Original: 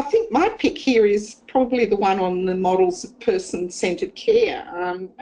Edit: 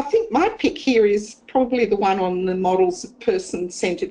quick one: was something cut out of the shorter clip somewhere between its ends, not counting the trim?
no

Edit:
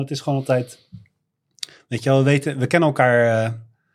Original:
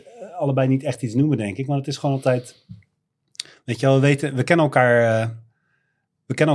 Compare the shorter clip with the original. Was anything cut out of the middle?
no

